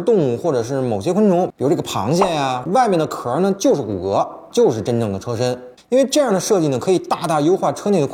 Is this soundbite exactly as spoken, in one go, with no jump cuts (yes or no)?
no